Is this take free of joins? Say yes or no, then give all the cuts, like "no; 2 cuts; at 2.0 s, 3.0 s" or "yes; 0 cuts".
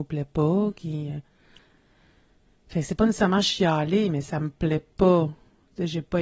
yes; 0 cuts